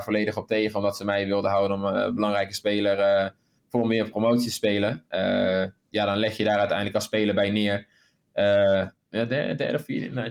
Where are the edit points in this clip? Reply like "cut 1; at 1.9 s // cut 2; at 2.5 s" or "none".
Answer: cut 1; at 9.1 s